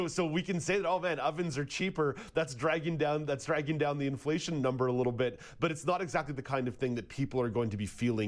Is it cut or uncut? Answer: uncut